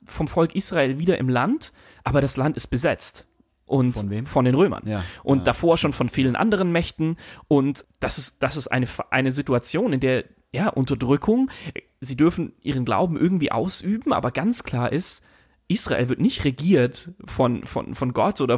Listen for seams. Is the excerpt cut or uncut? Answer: cut